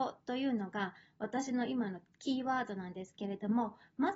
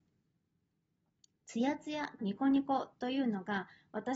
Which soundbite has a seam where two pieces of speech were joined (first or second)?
second